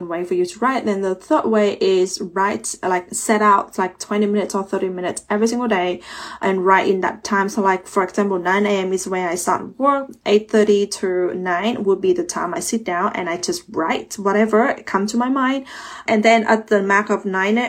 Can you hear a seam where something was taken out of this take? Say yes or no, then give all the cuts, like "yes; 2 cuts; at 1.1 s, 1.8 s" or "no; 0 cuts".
no; 0 cuts